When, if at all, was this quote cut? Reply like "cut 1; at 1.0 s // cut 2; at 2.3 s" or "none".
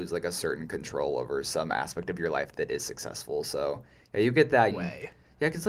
cut 1; at 4.7 s